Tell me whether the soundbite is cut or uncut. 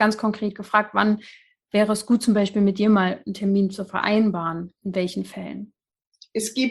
uncut